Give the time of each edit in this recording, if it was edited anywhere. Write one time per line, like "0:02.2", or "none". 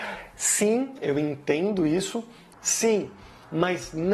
0:02.5